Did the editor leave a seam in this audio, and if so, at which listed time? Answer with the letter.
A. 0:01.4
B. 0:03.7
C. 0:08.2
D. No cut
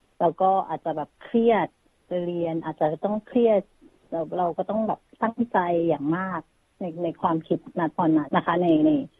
C